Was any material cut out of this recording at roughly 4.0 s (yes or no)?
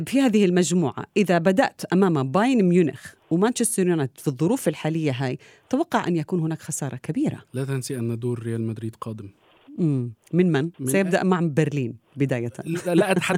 no